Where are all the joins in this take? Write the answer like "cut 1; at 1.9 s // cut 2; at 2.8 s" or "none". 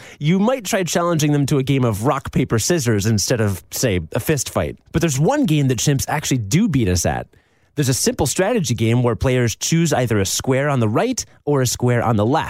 cut 1; at 4.9 s